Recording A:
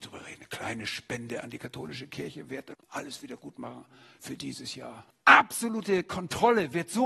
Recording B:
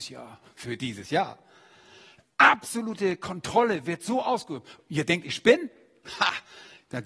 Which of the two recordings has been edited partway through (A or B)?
A